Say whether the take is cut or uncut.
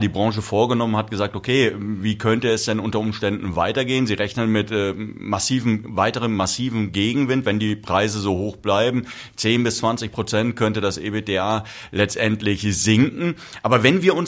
uncut